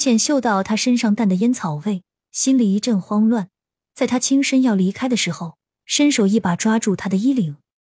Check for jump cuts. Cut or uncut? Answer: cut